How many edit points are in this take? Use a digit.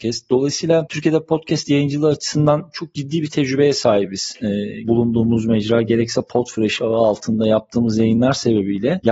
1